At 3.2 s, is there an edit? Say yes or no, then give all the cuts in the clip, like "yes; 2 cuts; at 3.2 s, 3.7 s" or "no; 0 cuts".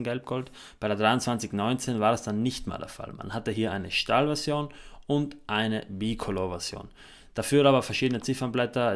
no; 0 cuts